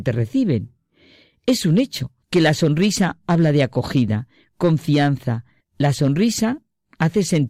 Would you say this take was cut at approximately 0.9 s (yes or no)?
no